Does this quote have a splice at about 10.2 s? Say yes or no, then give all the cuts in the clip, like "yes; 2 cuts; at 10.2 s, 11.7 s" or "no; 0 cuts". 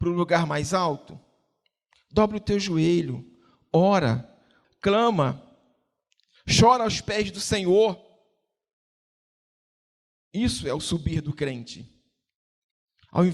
no; 1 cut; at 4.6 s